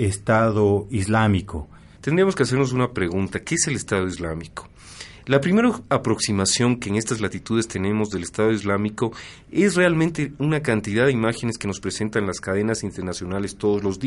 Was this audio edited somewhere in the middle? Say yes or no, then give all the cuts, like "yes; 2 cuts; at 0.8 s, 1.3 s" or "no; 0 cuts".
yes; 1 cut; at 2.0 s